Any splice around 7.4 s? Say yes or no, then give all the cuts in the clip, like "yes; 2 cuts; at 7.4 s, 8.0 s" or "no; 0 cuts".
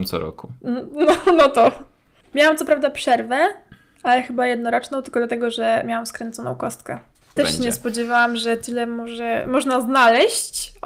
yes; 1 cut; at 7.4 s